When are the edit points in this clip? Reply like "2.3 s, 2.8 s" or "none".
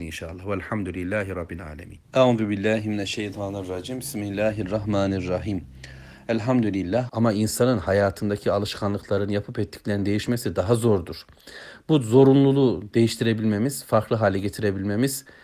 2.0 s, 7.1 s